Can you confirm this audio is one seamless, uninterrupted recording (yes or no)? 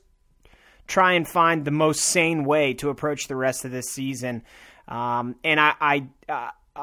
yes